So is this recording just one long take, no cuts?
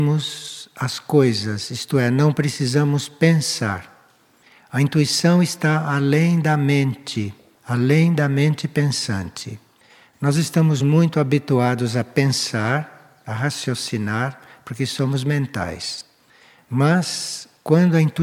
yes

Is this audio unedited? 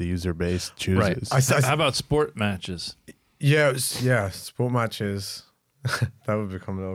yes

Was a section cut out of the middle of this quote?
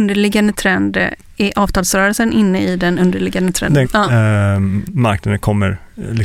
yes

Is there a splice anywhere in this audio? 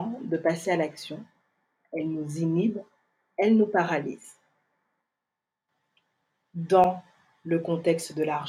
no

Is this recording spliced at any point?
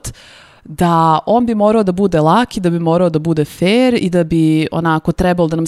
no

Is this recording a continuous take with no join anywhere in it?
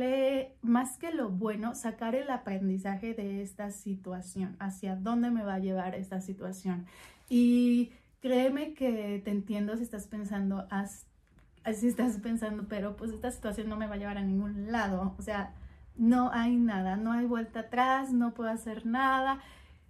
yes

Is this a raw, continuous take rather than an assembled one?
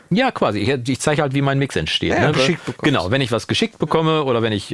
no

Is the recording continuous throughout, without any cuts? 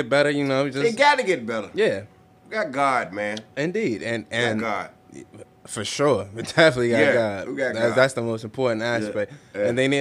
yes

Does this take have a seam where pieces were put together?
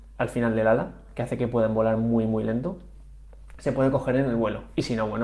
no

